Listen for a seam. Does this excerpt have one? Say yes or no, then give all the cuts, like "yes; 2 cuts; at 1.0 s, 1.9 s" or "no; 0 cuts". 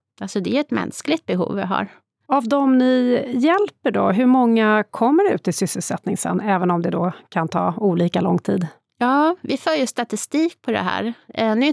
no; 0 cuts